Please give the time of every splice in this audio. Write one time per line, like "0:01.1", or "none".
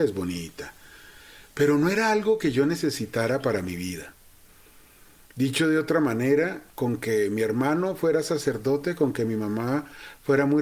none